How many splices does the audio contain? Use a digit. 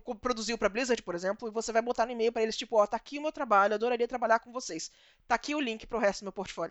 0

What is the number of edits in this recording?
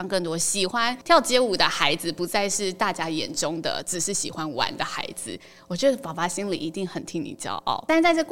0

